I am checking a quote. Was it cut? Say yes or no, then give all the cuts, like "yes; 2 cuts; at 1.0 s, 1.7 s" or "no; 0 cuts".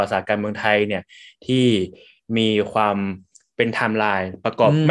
no; 0 cuts